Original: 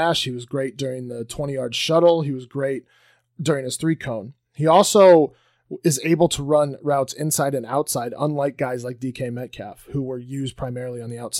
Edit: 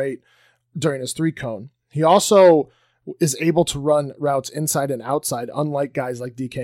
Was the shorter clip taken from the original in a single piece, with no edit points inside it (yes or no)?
yes